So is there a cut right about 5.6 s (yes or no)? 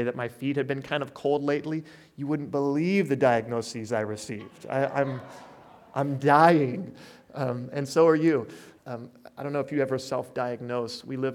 no